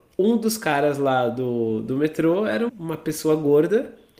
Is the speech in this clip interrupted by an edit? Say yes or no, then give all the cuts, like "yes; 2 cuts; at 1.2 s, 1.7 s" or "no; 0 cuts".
yes; 1 cut; at 2.7 s